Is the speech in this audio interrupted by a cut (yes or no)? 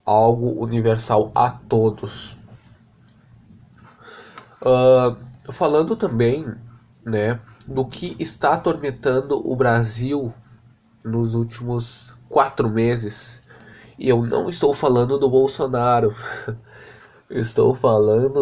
no